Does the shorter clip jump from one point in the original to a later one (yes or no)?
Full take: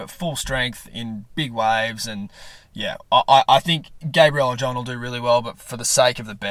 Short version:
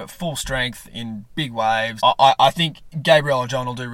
yes